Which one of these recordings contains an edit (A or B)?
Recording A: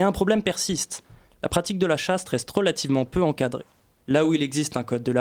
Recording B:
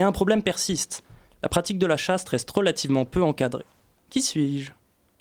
B